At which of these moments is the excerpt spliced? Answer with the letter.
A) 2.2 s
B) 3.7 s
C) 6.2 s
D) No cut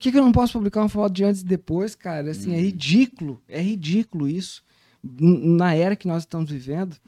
D